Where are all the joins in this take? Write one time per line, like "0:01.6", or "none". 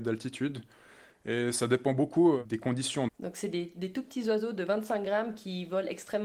0:03.1